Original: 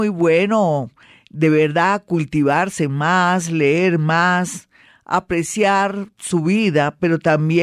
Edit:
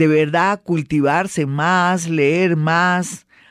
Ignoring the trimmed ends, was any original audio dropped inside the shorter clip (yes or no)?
no